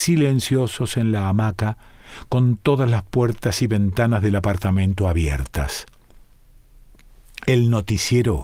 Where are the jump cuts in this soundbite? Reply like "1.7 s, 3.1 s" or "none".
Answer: none